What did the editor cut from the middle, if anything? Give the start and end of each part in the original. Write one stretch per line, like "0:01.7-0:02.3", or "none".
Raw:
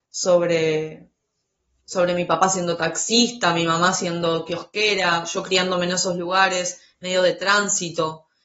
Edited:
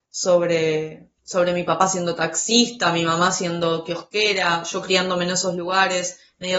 0:01.2-0:01.8